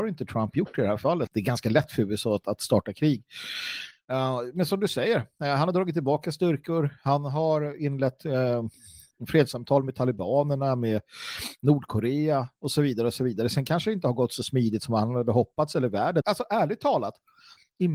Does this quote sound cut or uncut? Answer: cut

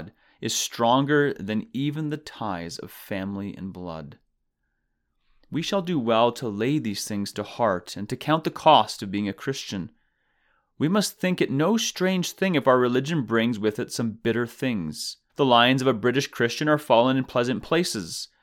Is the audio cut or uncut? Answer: cut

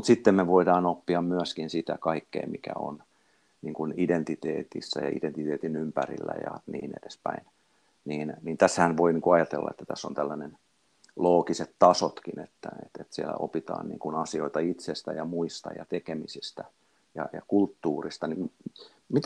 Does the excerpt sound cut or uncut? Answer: uncut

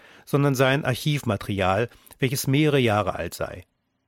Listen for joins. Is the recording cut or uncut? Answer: uncut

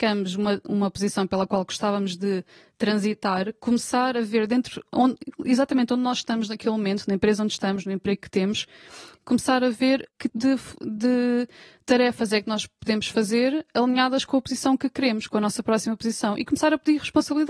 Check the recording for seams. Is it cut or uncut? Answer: cut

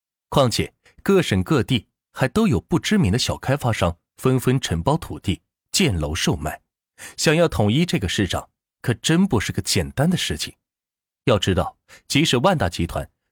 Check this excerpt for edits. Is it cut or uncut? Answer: cut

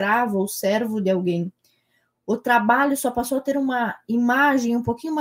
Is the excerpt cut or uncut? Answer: uncut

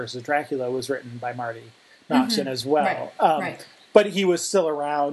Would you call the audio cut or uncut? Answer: uncut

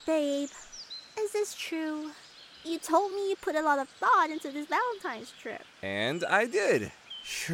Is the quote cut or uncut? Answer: uncut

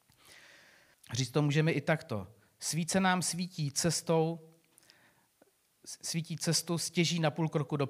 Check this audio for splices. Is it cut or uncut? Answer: cut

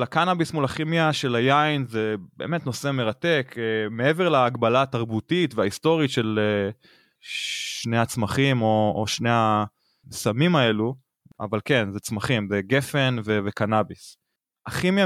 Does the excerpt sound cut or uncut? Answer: uncut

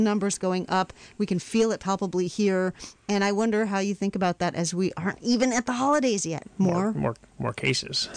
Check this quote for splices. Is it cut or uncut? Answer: cut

